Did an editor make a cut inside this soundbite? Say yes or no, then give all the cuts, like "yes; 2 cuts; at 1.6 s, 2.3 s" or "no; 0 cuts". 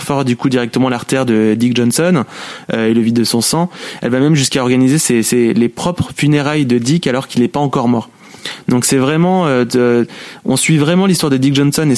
no; 0 cuts